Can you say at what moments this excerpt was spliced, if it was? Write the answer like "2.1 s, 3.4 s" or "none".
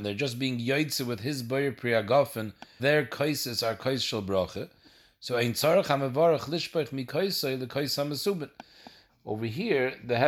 2.8 s, 9.1 s